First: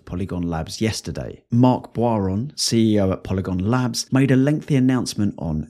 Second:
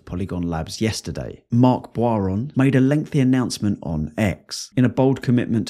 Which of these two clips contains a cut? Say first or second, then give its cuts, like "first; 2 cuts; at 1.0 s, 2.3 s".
second; 2 cuts; at 2.5 s, 4.7 s